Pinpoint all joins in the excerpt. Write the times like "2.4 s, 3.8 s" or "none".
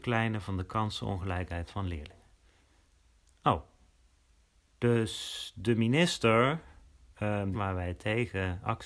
7.5 s